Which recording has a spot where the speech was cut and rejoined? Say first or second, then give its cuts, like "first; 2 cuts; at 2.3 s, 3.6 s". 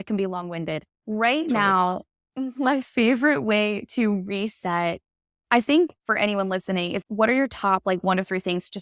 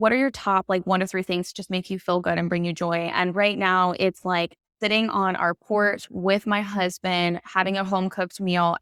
first; 2 cuts; at 0.9 s, 7.0 s